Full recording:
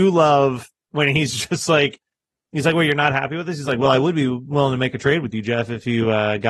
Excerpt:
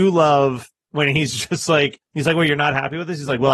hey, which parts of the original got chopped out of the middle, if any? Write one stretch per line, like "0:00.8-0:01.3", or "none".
0:02.1-0:02.4